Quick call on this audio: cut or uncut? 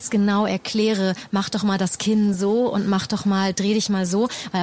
uncut